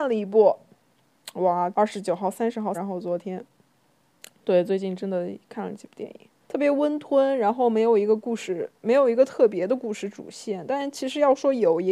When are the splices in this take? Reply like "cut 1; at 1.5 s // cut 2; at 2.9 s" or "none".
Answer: cut 1; at 1.7 s // cut 2; at 2.7 s // cut 3; at 6.4 s